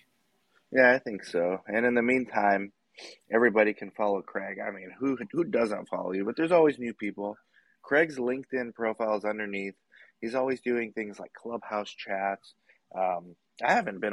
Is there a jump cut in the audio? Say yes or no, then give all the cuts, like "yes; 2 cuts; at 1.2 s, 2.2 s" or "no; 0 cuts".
no; 0 cuts